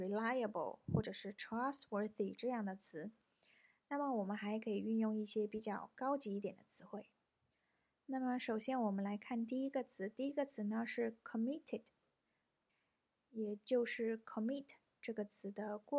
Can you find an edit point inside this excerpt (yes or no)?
no